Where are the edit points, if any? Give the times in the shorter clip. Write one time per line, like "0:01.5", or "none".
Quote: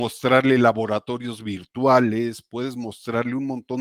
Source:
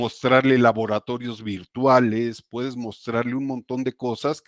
none